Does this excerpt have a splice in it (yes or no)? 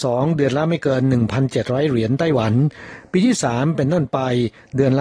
no